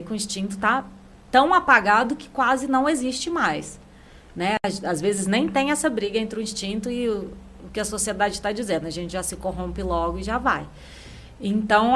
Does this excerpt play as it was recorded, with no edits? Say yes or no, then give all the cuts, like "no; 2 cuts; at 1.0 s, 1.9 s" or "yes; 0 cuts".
yes; 0 cuts